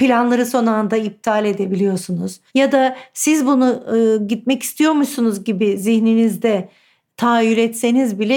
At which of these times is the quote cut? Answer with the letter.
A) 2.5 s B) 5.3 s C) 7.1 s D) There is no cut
A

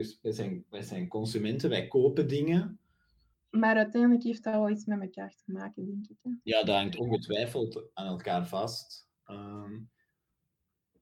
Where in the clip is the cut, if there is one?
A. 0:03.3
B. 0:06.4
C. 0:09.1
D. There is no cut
A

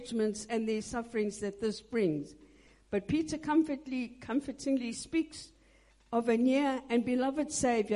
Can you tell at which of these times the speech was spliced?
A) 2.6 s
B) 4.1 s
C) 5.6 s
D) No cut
D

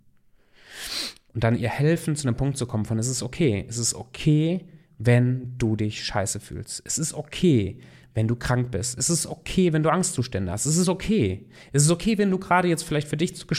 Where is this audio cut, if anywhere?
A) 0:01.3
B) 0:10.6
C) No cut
A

